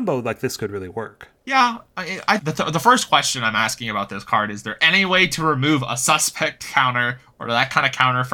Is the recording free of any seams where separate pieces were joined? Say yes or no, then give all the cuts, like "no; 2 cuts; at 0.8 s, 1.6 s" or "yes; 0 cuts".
no; 2 cuts; at 1.4 s, 2.4 s